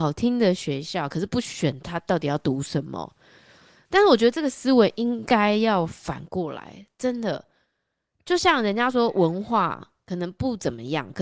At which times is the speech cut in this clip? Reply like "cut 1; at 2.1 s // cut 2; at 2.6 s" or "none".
none